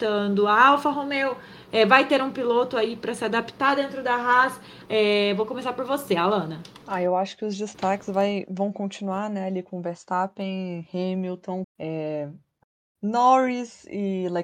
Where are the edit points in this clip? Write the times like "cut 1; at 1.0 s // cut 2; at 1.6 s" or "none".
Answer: cut 1; at 4.9 s // cut 2; at 6.8 s // cut 3; at 11.6 s